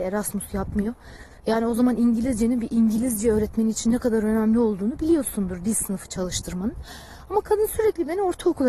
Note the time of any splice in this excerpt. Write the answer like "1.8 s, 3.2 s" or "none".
1.4 s